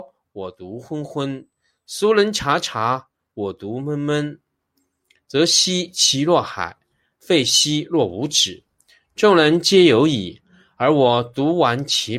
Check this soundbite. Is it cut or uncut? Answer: uncut